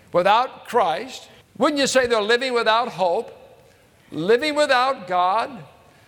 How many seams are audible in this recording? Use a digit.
1